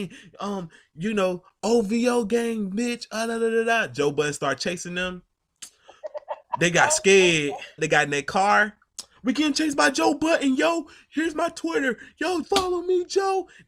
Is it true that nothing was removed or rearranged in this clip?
no; 2 cuts; at 7.8 s, 12.4 s

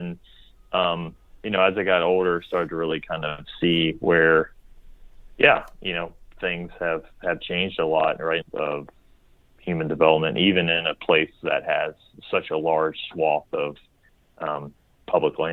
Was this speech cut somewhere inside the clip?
yes; 1 cut; at 8.4 s

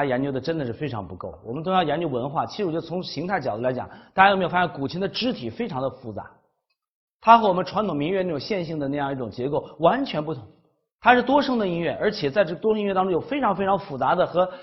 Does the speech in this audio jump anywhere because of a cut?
yes; 1 cut; at 7.1 s

